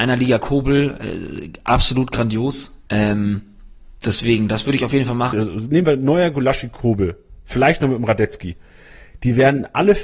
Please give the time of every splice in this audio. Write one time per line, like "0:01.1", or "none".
0:02.9
0:05.3